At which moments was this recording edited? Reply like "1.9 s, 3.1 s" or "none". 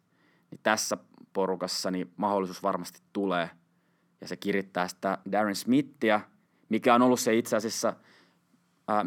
5.2 s